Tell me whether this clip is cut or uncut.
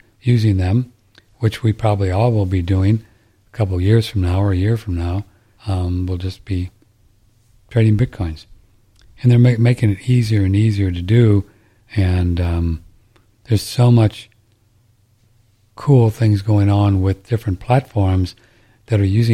cut